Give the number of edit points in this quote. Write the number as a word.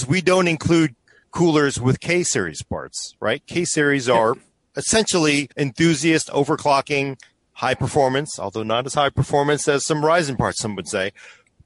one